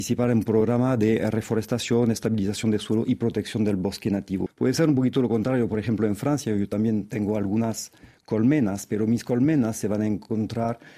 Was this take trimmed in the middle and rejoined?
yes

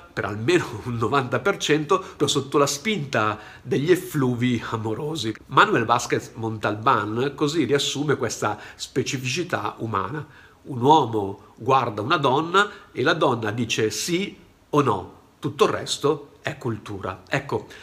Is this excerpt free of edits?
no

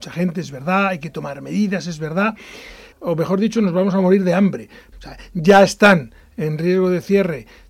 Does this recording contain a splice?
yes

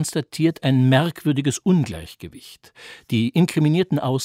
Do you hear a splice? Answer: no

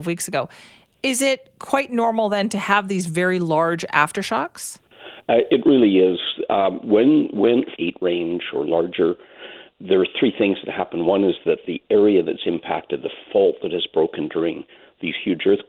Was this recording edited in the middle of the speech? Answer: yes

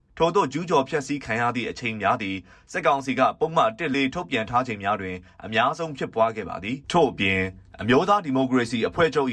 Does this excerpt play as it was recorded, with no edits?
no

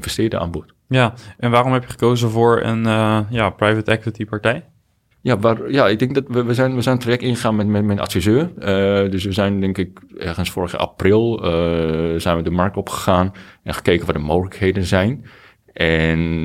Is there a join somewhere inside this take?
yes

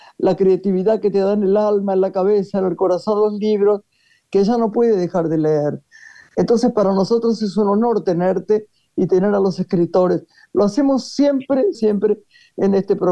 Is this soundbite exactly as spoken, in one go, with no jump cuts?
no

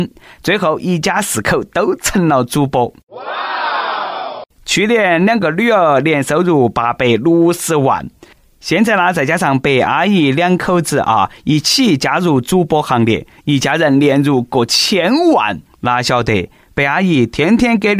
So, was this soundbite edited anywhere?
yes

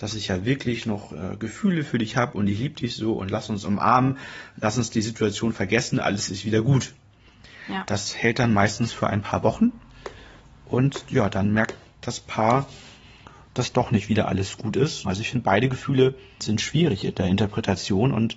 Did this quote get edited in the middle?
yes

